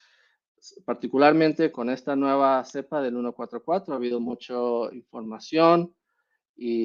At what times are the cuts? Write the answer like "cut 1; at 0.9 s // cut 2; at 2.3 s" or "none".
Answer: cut 1; at 1.7 s